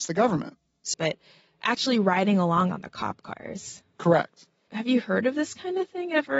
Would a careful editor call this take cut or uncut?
cut